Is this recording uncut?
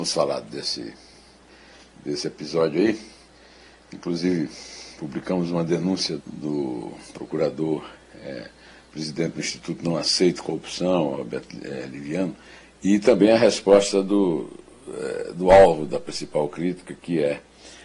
no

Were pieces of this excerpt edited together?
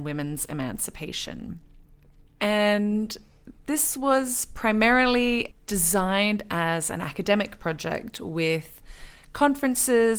no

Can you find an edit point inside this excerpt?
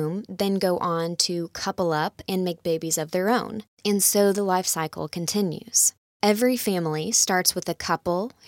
yes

